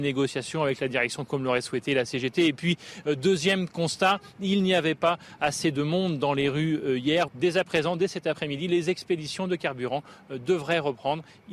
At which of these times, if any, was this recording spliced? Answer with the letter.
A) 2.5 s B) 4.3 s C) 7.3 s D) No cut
C